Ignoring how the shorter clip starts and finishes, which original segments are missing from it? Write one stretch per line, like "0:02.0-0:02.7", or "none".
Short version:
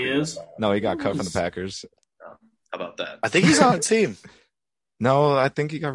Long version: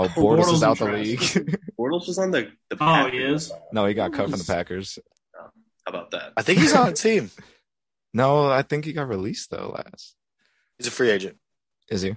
none